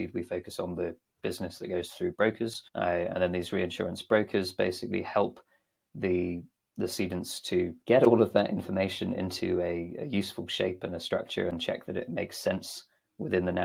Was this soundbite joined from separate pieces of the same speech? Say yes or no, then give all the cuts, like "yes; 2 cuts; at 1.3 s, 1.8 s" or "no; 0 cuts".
yes; 2 cuts; at 2.7 s, 7.8 s